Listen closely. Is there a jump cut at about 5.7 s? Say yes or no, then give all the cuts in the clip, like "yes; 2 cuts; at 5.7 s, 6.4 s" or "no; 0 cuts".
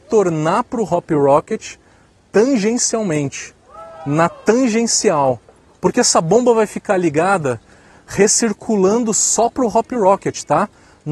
yes; 1 cut; at 5.7 s